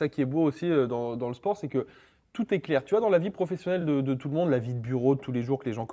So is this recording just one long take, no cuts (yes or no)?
yes